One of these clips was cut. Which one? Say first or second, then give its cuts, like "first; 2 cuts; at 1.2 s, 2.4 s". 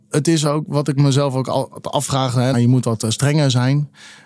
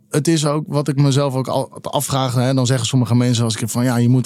first; 1 cut; at 2.5 s